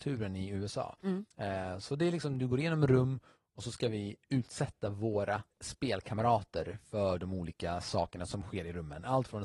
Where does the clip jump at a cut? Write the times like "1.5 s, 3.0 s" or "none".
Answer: 5.5 s